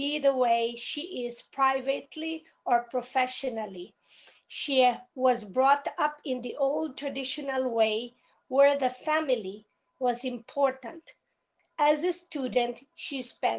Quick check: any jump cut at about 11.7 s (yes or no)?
no